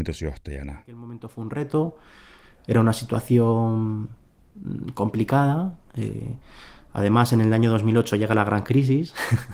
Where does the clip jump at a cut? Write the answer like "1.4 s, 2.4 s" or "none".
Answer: none